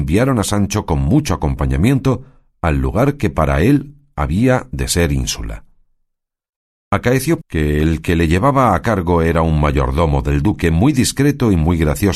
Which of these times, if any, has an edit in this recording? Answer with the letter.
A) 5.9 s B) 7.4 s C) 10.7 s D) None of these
B